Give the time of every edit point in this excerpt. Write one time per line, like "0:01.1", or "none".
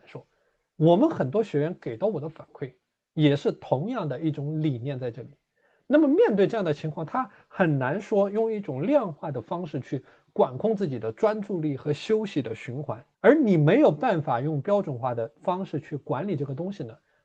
0:05.8
0:13.1